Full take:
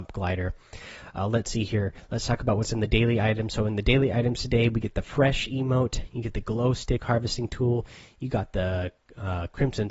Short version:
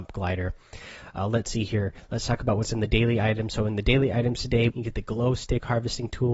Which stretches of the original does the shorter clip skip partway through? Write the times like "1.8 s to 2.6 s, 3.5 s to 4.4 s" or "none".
4.7 s to 6.1 s